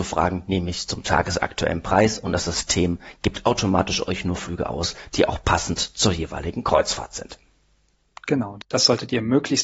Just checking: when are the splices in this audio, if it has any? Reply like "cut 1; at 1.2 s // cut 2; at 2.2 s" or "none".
none